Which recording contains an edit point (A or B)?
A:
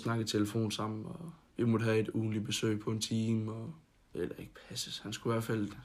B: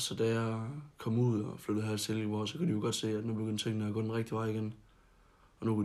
A